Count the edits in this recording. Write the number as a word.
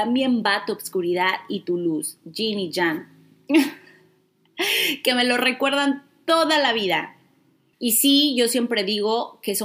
one